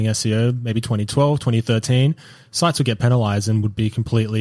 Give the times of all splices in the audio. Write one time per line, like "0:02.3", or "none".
none